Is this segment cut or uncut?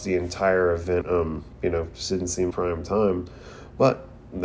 cut